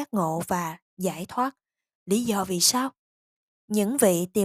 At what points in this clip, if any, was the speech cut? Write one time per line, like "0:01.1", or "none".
none